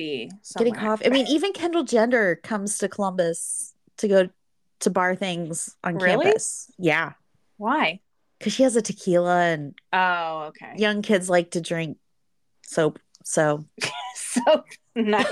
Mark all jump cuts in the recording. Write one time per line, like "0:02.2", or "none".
none